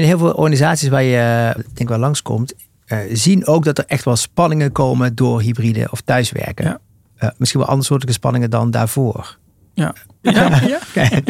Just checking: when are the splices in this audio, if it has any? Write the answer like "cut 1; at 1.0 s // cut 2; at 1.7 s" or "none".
cut 1; at 1.6 s // cut 2; at 10.2 s